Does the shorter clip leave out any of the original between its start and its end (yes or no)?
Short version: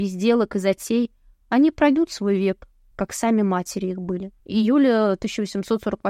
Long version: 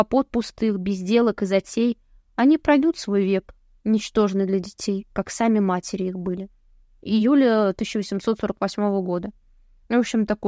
yes